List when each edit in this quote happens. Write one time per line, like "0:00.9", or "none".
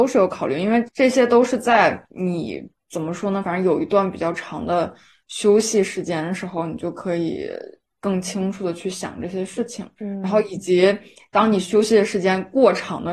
none